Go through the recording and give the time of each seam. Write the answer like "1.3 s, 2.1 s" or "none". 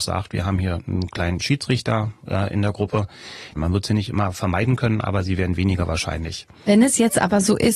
3.6 s

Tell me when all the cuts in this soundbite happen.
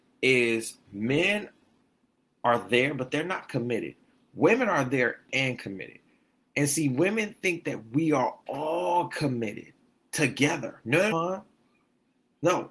11.1 s

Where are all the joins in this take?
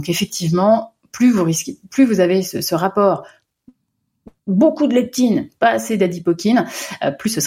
none

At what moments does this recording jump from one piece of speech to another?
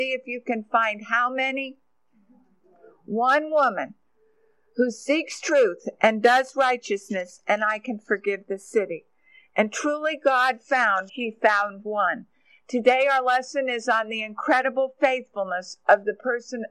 11.1 s

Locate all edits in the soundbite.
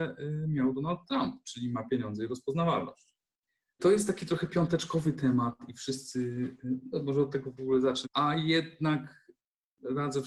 3.8 s, 8.0 s

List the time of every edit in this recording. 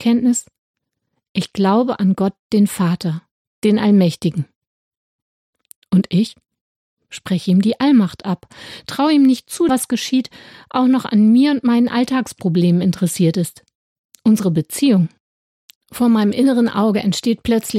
9.7 s, 14.1 s

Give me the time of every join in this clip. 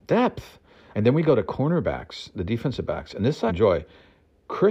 0.9 s, 3.5 s

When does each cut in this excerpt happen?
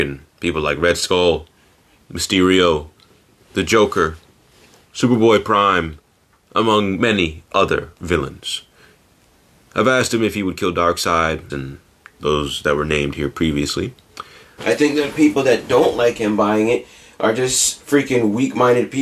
11.5 s, 14.6 s

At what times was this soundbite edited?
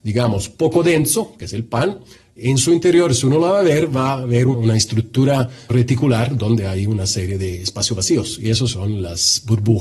5.7 s

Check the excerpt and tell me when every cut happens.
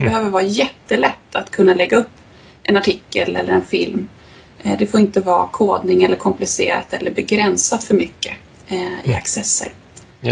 none

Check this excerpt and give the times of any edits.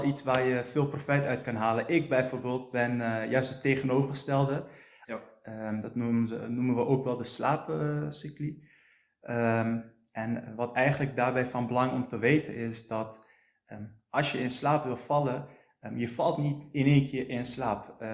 5.0 s

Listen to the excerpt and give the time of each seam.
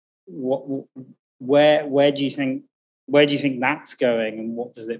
none

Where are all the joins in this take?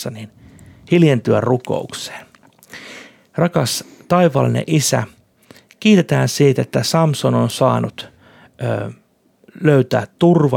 none

